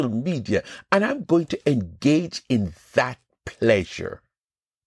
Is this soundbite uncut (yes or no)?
yes